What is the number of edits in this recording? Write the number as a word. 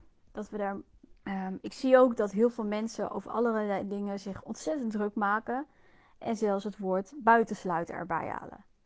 one